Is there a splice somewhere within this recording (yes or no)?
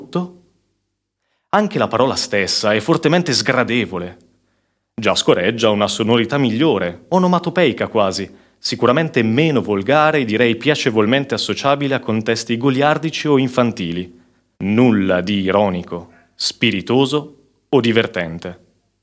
yes